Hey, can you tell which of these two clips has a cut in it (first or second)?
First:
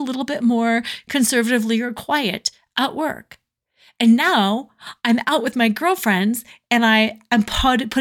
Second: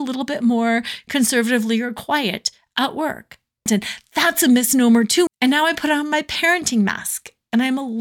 second